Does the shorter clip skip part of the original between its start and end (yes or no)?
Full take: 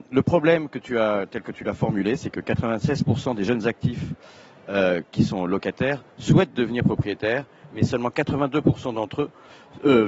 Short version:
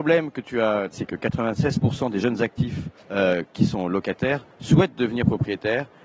yes